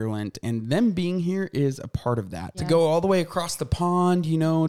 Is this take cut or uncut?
cut